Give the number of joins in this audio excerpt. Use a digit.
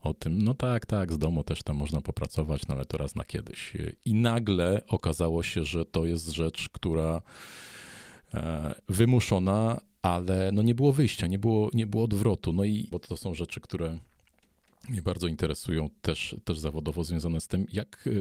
2